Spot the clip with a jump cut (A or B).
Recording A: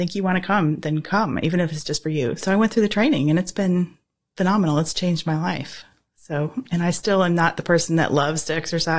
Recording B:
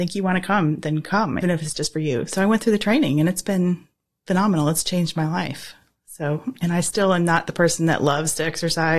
B